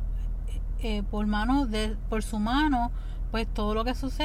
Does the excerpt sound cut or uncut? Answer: uncut